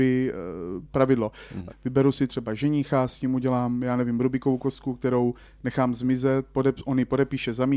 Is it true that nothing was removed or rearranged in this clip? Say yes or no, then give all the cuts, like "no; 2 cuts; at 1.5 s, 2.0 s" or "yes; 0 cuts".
no; 1 cut; at 1.7 s